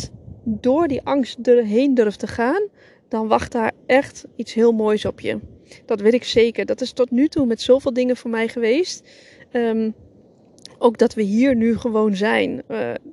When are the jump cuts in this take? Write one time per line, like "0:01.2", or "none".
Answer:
none